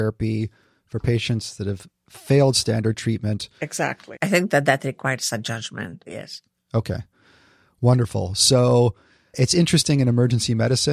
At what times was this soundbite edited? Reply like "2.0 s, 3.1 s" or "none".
4.2 s, 6.1 s